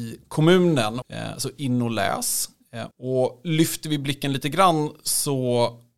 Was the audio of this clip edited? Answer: yes; 2 cuts; at 1.0 s, 2.9 s

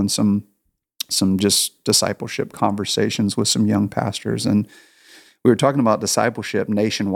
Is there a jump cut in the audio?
no; 0 cuts

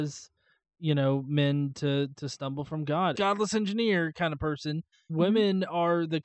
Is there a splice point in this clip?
yes; 2 cuts; at 3.1 s, 5.1 s

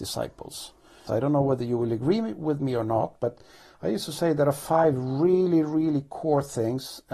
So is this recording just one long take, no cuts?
no; 1 cut; at 1.1 s

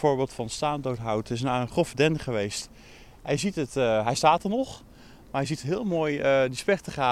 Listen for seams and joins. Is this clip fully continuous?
yes; 0 cuts

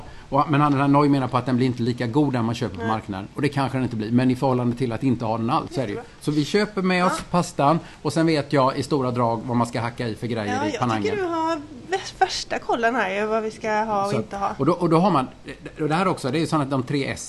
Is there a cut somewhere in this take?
yes; 1 cut; at 5.7 s

